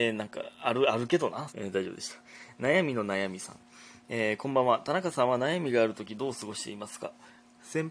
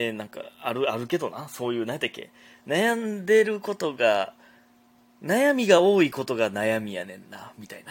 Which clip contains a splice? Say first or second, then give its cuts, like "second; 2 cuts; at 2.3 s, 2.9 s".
first; 1 cut; at 1.5 s